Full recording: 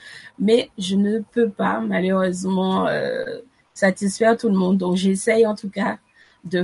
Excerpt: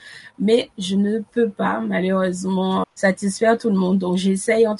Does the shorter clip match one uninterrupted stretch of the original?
no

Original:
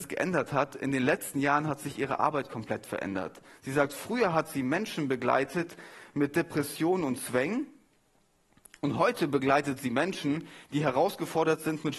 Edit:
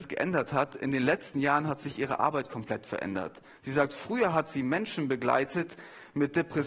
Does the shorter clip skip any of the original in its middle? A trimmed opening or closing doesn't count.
no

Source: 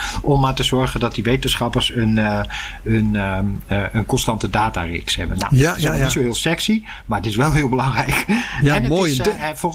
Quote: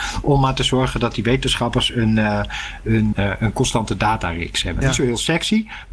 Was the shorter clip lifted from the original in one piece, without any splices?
no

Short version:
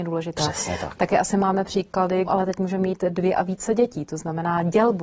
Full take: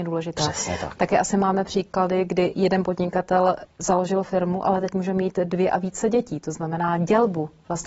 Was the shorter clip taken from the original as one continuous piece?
no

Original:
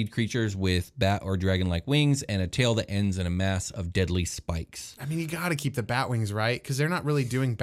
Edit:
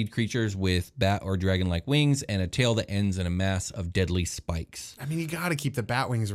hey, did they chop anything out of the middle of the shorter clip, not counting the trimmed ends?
no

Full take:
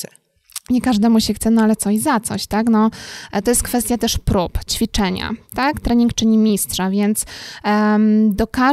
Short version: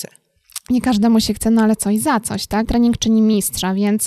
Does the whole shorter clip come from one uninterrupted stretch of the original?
no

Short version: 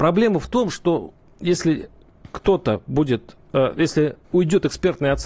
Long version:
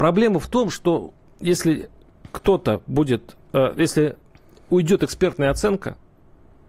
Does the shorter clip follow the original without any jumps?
no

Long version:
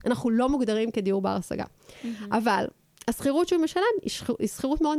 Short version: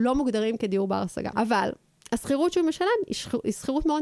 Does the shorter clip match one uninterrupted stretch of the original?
no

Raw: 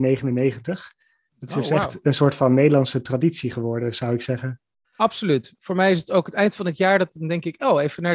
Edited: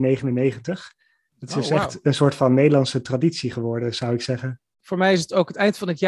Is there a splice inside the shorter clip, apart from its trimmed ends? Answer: yes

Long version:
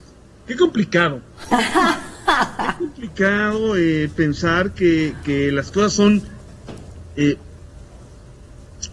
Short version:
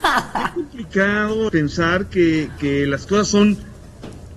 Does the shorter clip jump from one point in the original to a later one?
yes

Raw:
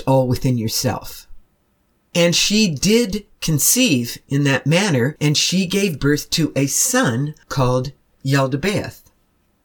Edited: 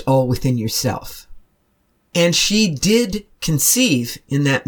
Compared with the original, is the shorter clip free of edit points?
yes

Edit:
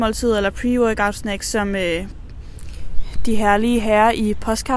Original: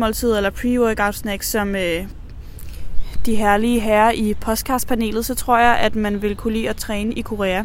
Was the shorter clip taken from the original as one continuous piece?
yes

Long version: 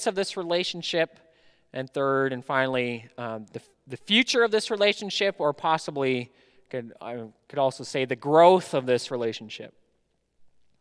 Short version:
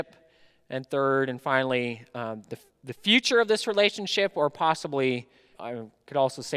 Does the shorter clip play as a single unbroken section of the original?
no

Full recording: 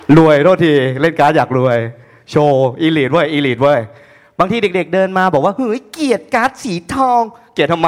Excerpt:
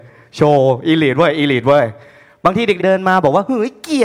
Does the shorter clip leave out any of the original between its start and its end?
yes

